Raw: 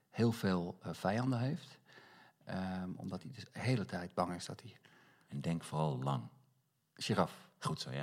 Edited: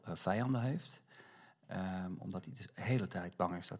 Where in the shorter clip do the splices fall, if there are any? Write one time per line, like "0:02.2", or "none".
none